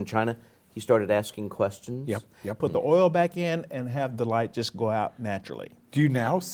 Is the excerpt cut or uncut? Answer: cut